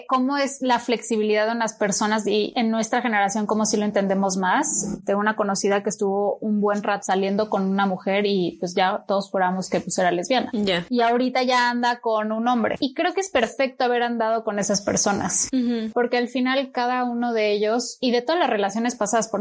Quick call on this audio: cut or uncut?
cut